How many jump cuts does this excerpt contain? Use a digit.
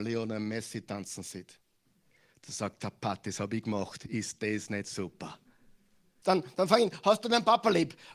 1